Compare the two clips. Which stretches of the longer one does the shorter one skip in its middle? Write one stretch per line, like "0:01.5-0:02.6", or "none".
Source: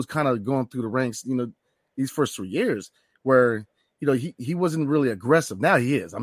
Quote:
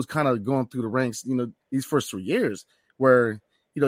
0:01.6-0:01.9